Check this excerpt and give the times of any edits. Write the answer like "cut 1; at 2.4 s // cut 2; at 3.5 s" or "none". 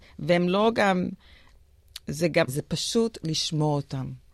cut 1; at 2.5 s